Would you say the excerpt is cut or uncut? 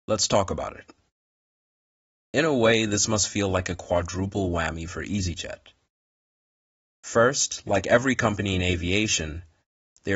uncut